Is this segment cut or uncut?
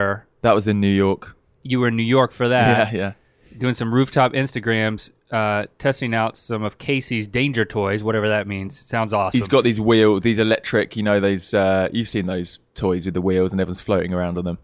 uncut